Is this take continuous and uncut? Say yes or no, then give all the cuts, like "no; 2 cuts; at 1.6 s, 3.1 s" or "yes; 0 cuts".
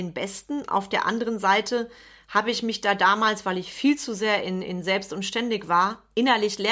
yes; 0 cuts